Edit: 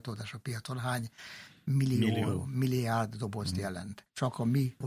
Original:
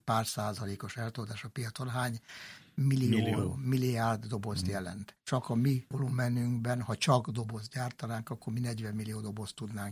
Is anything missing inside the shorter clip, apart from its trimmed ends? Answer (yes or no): no